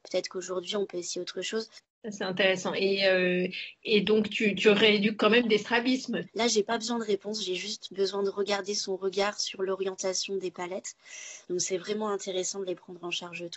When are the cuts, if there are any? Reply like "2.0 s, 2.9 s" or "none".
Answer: 6.3 s, 11.4 s